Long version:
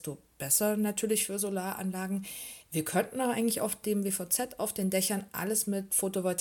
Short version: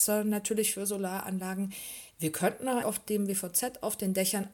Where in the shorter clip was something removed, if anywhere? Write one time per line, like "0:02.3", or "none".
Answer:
0:02.8